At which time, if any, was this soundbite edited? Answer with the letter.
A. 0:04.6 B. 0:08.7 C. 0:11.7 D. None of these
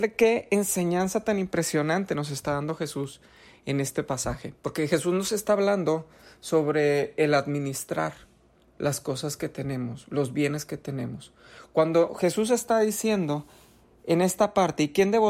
A